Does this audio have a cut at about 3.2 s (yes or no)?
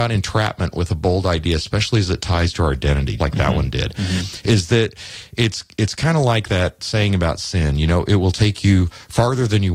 yes